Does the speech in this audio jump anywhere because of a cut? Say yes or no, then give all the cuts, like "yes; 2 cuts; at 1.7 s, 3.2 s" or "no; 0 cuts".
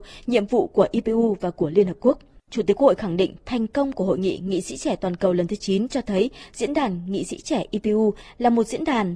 yes; 1 cut; at 2.5 s